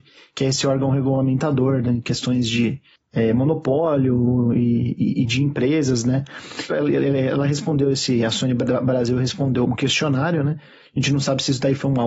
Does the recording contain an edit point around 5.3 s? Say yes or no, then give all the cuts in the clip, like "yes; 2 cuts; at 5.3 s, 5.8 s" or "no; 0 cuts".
no; 2 cuts; at 6.7 s, 9.7 s